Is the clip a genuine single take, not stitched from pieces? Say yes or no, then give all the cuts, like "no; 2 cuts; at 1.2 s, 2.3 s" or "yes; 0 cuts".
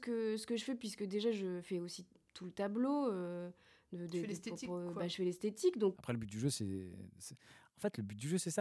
no; 1 cut; at 5.9 s